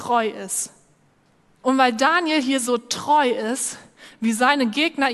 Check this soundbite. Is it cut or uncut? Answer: cut